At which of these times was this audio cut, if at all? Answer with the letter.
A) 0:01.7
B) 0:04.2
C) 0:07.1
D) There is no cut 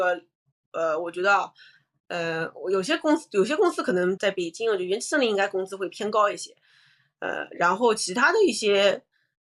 B